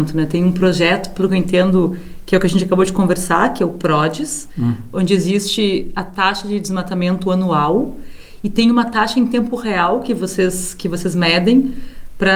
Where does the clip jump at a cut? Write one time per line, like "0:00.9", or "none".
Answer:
none